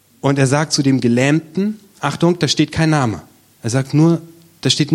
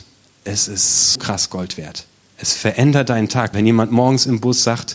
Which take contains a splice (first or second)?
second